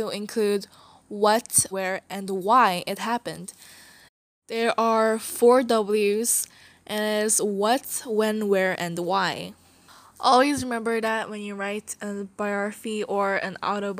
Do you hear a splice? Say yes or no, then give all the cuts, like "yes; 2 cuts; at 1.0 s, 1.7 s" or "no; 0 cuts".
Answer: yes; 1 cut; at 1.7 s